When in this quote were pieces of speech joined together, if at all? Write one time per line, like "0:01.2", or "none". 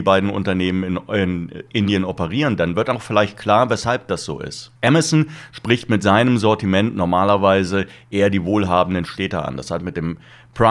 0:04.8